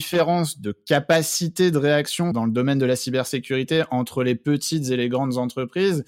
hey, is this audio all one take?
yes; 0 cuts

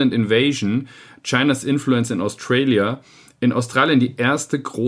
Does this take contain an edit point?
no; 0 cuts

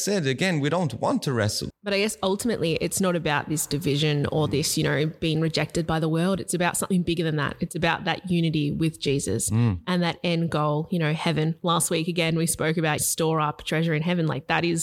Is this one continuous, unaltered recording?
no; 2 cuts; at 1.7 s, 13.0 s

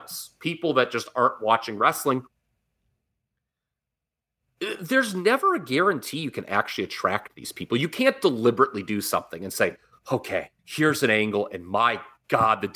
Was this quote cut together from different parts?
yes; 1 cut; at 10.6 s

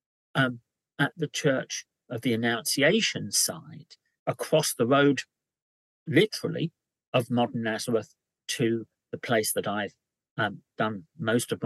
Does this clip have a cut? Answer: yes; 1 cut; at 4.2 s

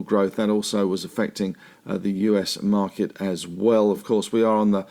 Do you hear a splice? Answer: no; 0 cuts

